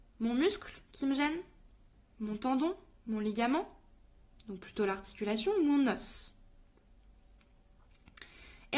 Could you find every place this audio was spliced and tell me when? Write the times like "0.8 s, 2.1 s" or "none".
none